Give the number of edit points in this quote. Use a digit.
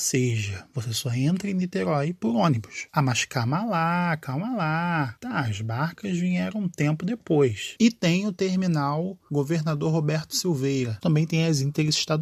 3